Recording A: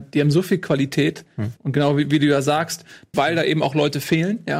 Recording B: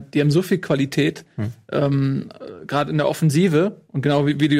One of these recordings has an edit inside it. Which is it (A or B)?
A